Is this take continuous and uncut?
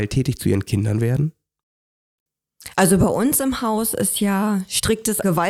yes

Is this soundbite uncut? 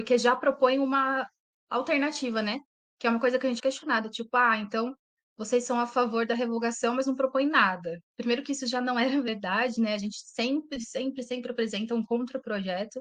no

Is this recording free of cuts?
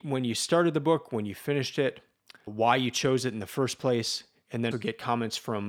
no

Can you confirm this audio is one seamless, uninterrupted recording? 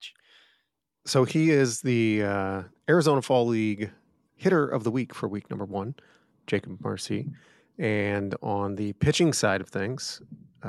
yes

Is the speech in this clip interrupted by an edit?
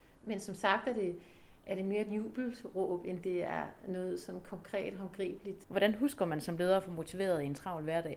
no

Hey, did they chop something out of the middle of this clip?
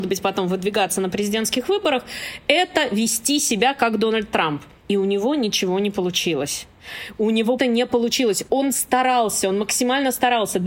yes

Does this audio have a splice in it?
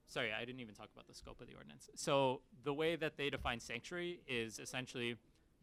no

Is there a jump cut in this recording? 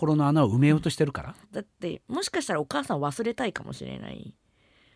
yes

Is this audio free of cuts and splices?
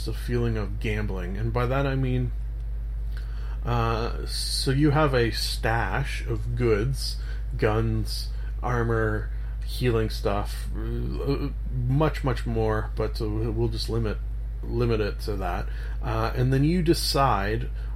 yes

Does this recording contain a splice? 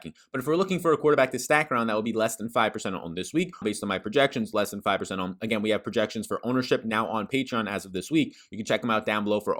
yes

